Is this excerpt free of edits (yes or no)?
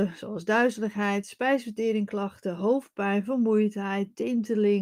yes